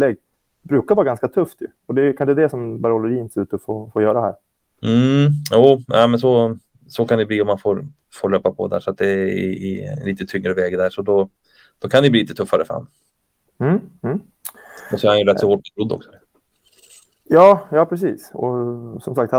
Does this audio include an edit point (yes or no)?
no